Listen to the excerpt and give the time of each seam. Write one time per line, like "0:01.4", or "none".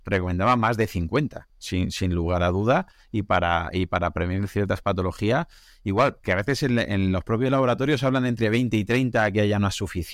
none

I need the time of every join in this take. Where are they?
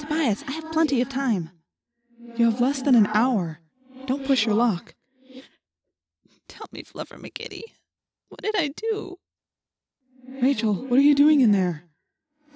0:05.4

